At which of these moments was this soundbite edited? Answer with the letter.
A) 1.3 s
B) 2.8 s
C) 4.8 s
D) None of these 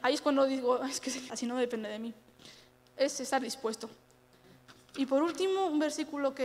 A